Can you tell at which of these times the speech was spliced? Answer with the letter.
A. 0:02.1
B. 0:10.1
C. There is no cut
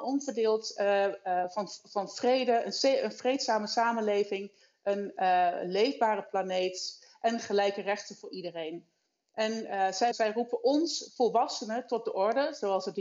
B